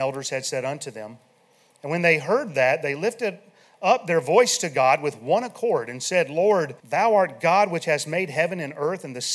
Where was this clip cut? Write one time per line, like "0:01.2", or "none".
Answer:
0:06.8